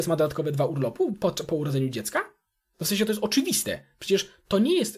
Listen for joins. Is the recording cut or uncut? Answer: uncut